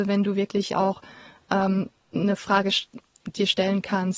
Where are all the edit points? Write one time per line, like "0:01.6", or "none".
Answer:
none